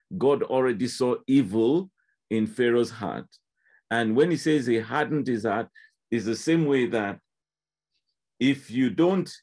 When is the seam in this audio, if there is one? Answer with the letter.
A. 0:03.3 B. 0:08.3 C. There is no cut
C